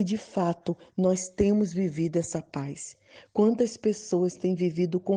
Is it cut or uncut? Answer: uncut